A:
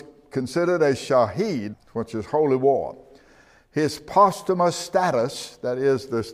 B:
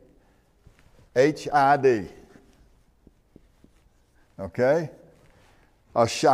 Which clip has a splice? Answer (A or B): A